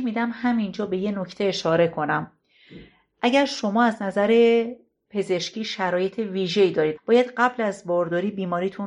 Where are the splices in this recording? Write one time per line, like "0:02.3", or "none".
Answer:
0:07.0